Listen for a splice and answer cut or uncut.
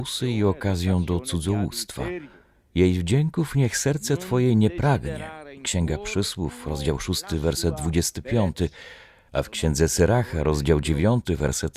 uncut